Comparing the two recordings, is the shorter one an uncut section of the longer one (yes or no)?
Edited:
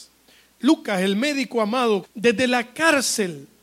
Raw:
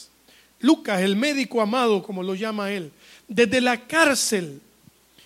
no